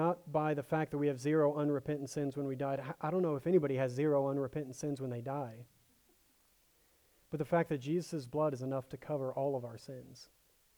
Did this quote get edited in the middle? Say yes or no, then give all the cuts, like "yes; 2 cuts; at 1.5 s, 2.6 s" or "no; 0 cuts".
no; 0 cuts